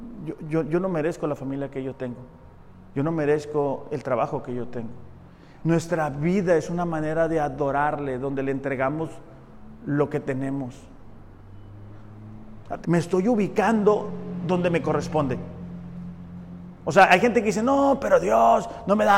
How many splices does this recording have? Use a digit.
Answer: 2